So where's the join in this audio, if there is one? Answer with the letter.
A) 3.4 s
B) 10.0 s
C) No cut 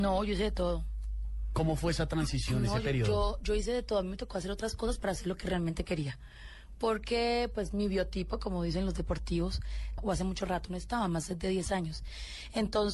B